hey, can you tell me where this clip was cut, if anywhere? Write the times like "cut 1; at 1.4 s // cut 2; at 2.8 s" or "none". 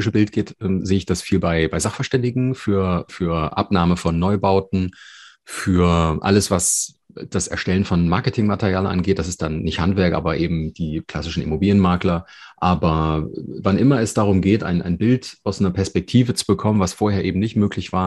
cut 1; at 3.1 s